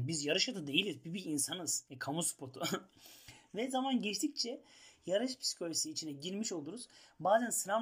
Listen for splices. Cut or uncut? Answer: uncut